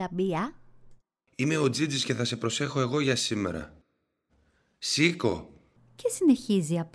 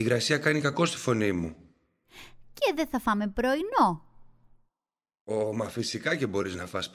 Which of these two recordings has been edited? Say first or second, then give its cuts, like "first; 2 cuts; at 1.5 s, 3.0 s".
first; 2 cuts; at 1.3 s, 5.8 s